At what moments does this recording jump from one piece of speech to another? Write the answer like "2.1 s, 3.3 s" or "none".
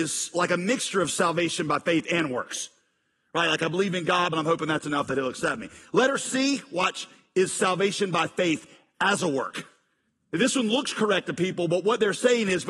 4.3 s